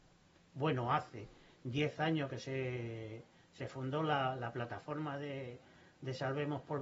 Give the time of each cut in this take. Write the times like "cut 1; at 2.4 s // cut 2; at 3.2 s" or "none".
none